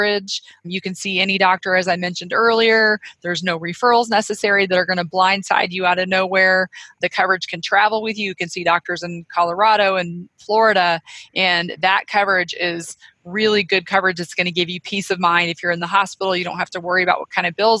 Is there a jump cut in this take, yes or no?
no